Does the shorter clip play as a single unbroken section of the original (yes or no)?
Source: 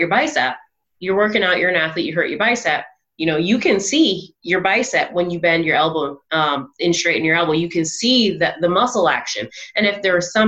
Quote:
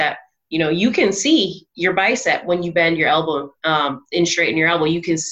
yes